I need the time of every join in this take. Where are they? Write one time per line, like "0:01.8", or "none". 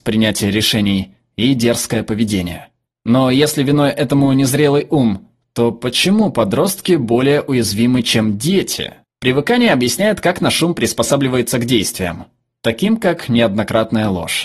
0:09.1